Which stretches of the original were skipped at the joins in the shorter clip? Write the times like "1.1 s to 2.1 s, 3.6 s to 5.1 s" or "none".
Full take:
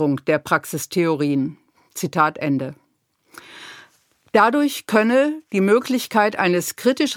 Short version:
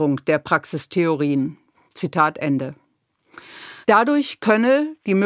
3.8 s to 4.3 s